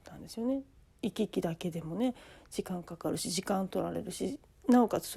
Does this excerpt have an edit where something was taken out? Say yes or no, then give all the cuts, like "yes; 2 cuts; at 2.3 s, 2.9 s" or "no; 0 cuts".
no; 0 cuts